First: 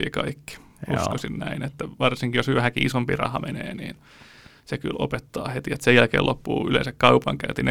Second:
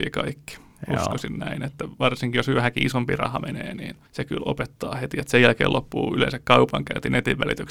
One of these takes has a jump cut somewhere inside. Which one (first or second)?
second